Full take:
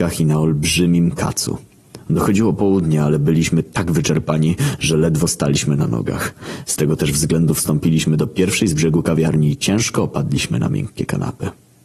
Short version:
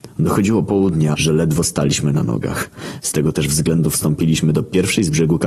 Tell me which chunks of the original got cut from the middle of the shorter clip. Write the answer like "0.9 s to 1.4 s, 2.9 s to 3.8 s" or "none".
3.0 s to 4.8 s